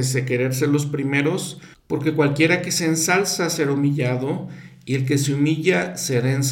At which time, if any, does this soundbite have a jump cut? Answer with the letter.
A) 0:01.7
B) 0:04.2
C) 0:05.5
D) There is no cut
A